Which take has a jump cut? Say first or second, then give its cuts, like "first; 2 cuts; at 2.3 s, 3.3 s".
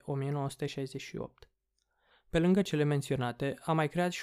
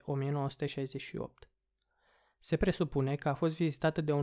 first; 1 cut; at 2.1 s